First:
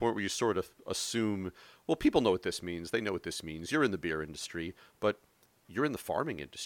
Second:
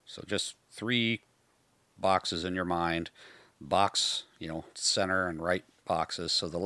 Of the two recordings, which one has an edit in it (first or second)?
second